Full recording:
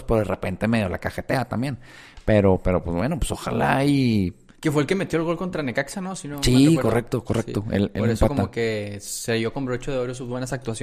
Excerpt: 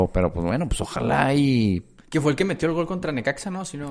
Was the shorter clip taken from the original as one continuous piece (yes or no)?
yes